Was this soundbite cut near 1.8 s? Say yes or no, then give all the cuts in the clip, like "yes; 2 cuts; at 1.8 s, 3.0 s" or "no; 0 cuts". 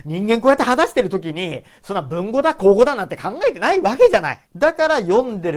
no; 1 cut; at 4.5 s